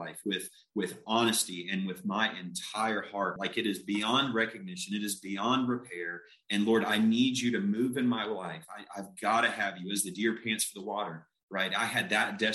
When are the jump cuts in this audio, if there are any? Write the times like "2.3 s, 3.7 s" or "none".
3.4 s